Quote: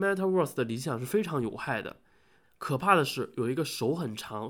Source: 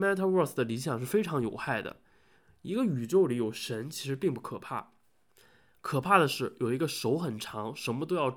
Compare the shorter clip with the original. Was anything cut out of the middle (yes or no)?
yes